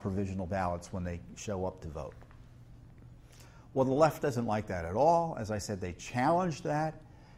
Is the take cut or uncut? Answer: uncut